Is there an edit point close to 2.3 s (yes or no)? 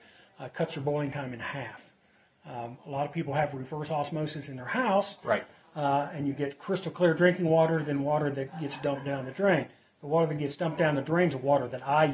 no